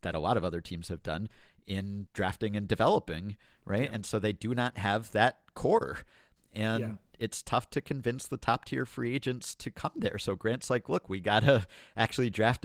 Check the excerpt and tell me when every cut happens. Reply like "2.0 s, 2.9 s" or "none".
none